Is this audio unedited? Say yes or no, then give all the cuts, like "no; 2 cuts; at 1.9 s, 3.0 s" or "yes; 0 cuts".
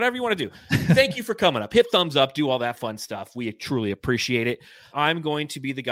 no; 1 cut; at 4.9 s